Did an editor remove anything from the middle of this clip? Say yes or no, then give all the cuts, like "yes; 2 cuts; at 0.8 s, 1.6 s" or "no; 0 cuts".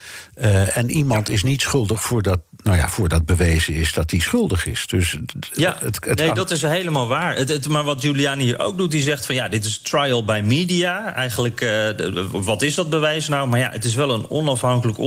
no; 0 cuts